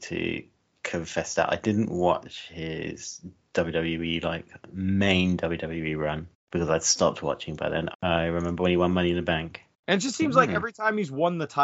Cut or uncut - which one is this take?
cut